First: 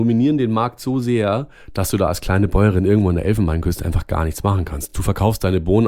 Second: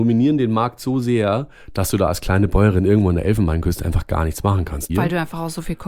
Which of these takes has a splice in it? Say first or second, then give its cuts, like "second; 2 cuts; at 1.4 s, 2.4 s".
second; 1 cut; at 4.9 s